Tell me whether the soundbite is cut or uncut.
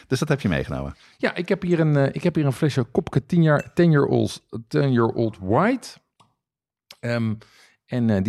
uncut